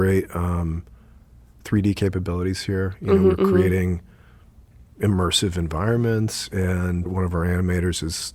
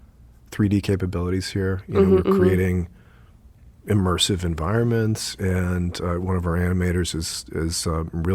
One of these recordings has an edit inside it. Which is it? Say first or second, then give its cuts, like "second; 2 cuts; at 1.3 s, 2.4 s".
first; 1 cut; at 7.1 s